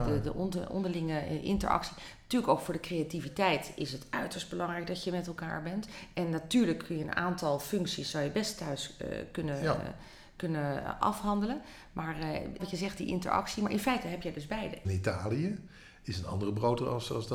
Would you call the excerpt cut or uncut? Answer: cut